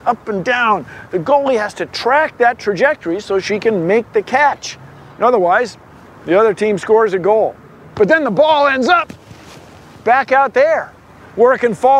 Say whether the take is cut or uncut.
cut